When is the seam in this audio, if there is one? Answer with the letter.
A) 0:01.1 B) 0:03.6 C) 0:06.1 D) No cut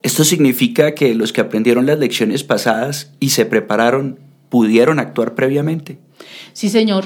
D